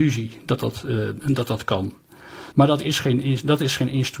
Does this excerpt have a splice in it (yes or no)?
yes